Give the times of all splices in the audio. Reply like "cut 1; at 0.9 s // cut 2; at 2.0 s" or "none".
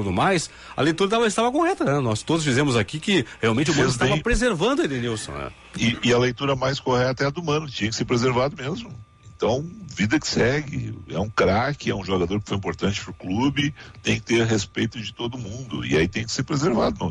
none